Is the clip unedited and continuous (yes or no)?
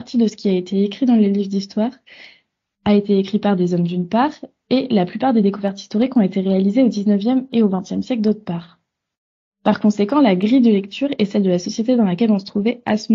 yes